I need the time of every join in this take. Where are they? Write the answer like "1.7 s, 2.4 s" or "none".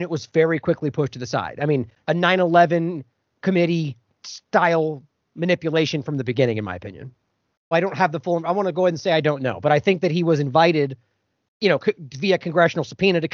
2.0 s, 7.7 s